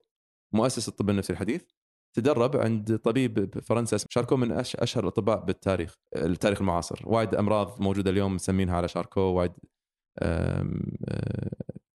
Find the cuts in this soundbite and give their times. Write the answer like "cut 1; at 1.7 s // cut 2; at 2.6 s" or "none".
cut 1; at 4.1 s // cut 2; at 6.1 s